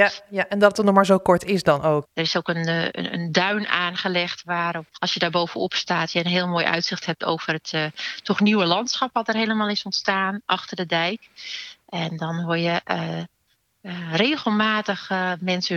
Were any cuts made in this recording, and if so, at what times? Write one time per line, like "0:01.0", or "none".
0:02.0
0:04.9